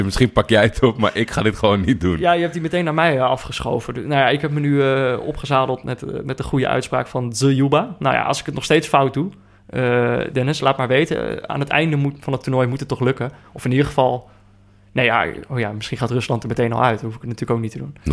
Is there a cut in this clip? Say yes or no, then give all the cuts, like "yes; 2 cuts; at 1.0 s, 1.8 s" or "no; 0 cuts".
no; 0 cuts